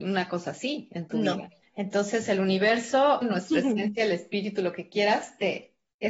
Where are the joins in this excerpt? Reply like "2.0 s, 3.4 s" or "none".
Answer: 1.6 s, 3.2 s